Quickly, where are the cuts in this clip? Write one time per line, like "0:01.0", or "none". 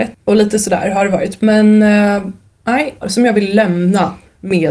0:03.0